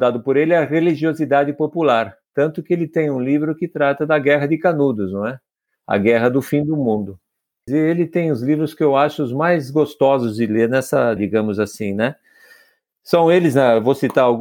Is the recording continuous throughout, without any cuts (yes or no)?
no